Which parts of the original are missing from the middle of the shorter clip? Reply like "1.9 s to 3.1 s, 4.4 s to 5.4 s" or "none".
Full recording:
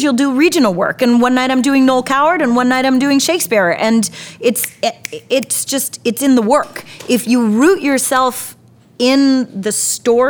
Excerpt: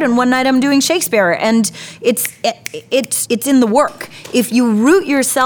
5.6 s to 6.0 s